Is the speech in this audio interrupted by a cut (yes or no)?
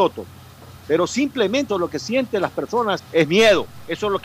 yes